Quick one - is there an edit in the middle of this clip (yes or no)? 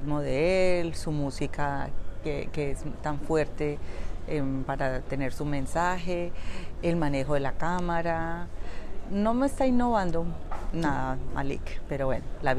no